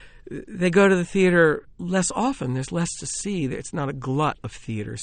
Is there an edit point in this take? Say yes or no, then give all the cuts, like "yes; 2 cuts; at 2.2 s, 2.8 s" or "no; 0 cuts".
yes; 1 cut; at 1.8 s